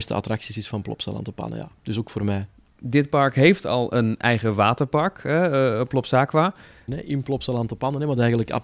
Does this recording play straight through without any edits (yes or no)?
no